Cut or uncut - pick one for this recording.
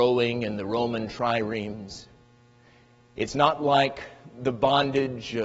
uncut